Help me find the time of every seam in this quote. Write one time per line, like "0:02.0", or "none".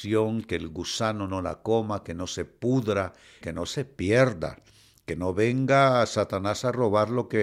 0:03.4